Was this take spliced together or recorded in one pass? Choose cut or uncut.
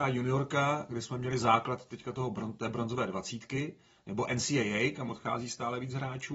uncut